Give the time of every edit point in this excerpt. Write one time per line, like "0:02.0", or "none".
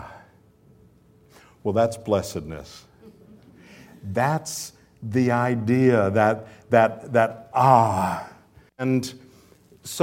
0:08.7